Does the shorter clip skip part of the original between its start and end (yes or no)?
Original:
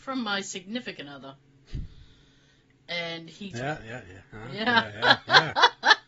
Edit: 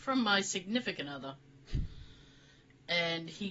no